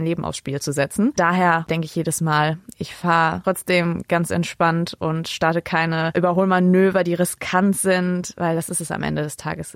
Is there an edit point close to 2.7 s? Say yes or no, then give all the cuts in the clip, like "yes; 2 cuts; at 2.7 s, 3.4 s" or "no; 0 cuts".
yes; 1 cut; at 2.7 s